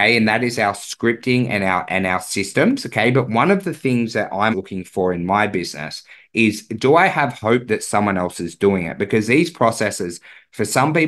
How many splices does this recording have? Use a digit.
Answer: 1